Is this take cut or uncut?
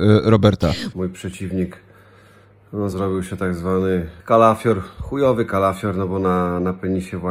cut